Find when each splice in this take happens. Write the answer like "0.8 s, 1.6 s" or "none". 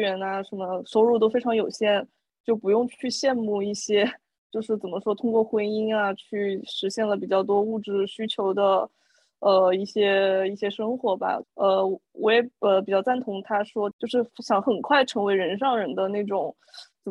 11.4 s, 13.9 s